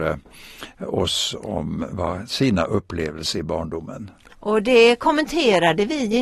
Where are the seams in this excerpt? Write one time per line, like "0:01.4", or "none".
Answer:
0:04.3

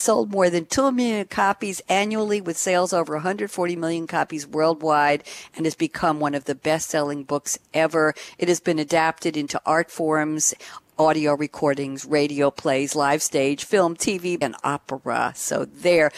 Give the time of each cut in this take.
0:14.4

